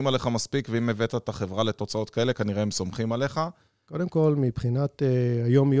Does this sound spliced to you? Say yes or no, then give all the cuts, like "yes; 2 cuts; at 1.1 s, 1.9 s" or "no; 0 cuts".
yes; 1 cut; at 3.8 s